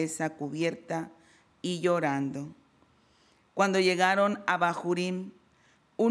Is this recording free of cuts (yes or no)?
yes